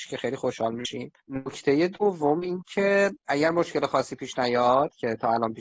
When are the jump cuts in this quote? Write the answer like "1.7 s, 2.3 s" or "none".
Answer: 1.2 s